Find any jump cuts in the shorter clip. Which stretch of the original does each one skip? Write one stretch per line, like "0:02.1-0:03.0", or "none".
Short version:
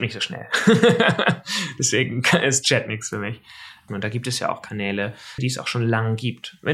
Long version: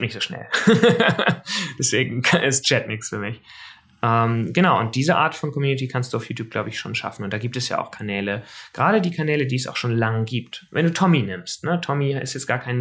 0:03.9-0:07.2
0:08.7-0:09.5